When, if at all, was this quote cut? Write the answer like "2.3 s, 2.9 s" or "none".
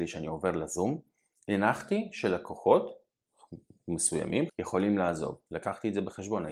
4.5 s